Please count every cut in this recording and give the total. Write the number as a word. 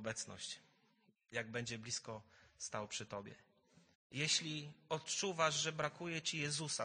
one